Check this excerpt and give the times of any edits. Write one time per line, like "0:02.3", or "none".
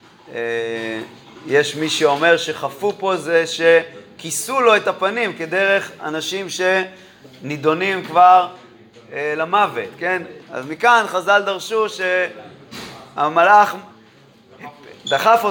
0:10.4